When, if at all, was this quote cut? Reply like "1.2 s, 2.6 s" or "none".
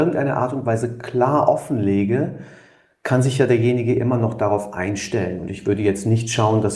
none